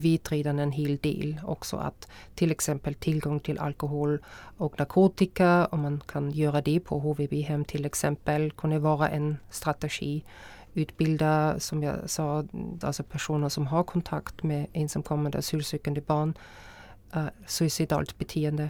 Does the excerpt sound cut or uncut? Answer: cut